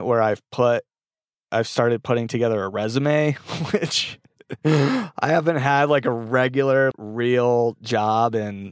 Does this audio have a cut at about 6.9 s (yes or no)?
yes